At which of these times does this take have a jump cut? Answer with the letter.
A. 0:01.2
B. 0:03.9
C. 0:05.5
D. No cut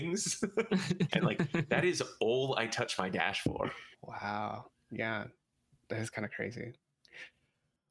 B